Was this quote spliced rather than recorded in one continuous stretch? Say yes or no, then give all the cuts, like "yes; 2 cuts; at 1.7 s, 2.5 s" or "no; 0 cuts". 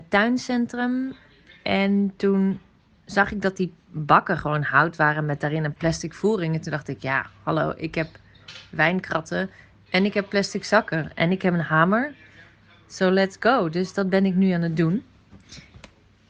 no; 0 cuts